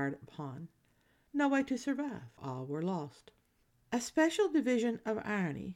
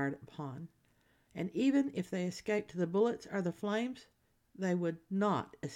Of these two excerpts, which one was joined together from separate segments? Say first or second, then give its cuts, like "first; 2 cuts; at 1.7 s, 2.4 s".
first; 2 cuts; at 1.3 s, 2.4 s